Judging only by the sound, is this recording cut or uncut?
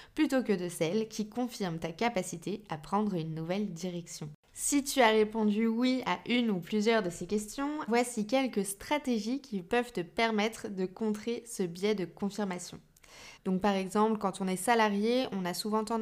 cut